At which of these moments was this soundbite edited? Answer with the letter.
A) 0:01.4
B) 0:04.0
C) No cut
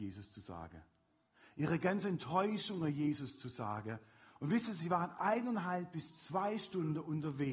C